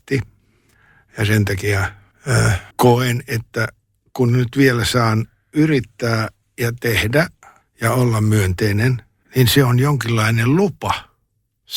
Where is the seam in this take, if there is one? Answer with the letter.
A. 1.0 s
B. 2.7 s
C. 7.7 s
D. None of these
B